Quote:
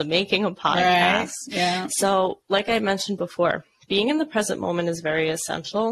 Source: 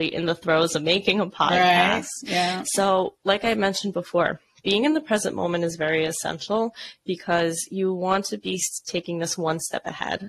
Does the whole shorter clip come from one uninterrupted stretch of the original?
yes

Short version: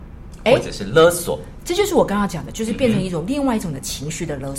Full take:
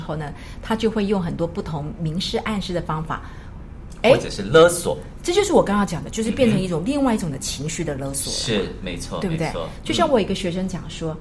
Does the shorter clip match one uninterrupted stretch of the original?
yes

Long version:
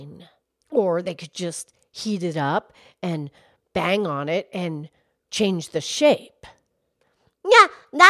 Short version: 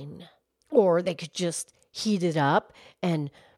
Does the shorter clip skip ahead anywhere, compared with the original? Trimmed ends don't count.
no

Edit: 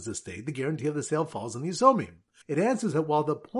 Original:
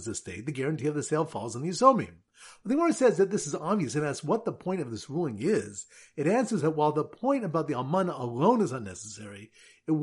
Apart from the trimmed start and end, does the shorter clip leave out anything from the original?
yes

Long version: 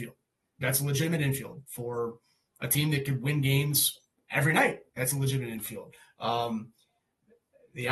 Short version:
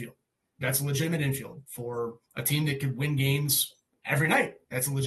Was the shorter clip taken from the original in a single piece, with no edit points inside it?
no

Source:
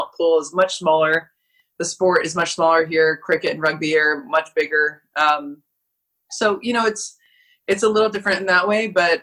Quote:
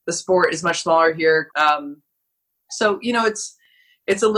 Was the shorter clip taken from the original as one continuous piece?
no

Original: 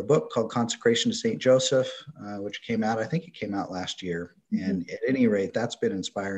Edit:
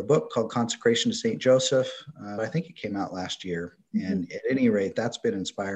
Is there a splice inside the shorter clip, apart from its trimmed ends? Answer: yes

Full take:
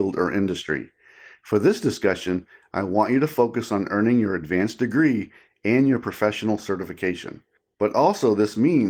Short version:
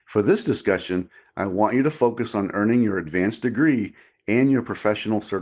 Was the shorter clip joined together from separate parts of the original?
no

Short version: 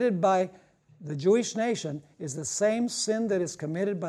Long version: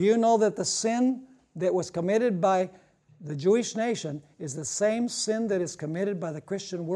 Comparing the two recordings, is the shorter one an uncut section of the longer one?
yes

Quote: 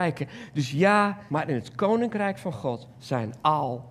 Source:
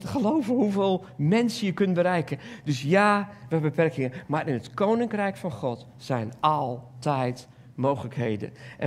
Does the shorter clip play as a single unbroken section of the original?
no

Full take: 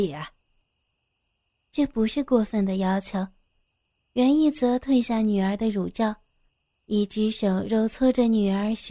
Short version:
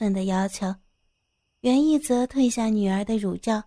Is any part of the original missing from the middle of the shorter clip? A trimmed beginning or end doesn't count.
no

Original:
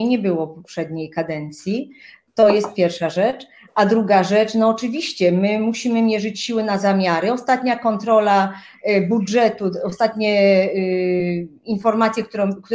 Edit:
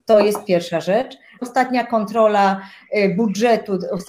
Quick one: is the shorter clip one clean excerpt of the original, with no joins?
no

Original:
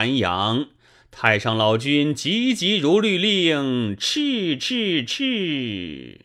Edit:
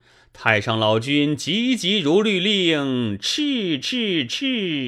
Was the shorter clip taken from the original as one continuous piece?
yes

